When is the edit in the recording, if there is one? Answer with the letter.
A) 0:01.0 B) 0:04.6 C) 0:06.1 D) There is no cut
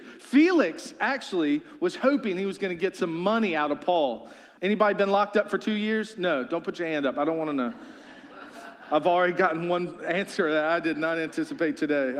B